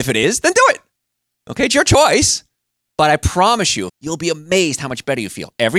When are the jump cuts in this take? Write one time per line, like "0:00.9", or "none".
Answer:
0:03.9